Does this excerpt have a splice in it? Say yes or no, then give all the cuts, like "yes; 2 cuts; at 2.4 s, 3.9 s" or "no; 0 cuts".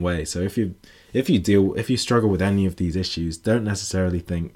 no; 0 cuts